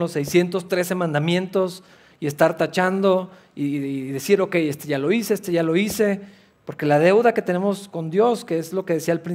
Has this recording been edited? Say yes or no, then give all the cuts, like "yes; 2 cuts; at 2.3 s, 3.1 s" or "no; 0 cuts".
no; 0 cuts